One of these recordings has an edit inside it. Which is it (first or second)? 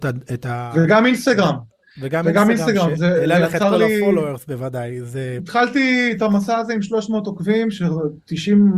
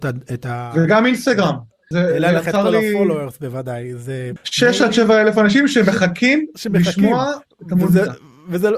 second